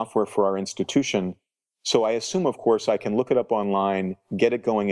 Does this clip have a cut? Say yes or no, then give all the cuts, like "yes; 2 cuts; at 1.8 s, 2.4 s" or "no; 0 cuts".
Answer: no; 0 cuts